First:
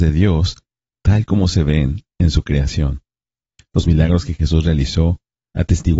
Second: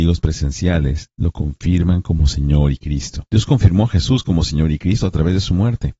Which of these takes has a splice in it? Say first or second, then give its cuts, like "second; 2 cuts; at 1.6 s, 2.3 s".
second; 2 cuts; at 1.1 s, 3.3 s